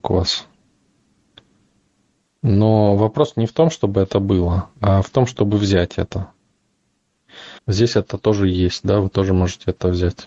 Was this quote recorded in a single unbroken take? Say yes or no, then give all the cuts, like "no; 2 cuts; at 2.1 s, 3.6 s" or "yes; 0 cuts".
no; 2 cuts; at 4.7 s, 7.6 s